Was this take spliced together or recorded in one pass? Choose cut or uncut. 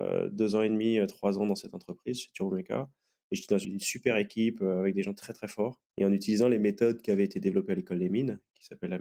cut